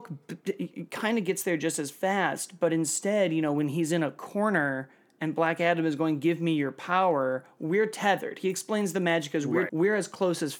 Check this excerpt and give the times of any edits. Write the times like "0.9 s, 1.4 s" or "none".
9.7 s